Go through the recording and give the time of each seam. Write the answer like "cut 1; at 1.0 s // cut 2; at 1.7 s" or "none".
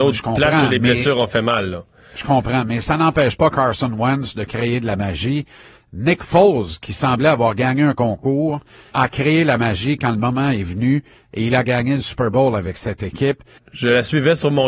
cut 1; at 8.9 s // cut 2; at 13.6 s